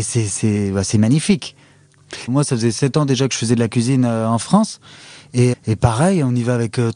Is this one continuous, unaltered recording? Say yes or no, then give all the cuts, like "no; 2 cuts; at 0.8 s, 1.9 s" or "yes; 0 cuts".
no; 2 cuts; at 2.3 s, 5.5 s